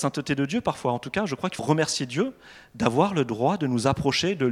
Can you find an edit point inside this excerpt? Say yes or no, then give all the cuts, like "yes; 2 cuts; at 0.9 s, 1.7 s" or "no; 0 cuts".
yes; 1 cut; at 1.6 s